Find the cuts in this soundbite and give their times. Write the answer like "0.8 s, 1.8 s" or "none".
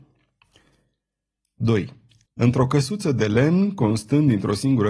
2.3 s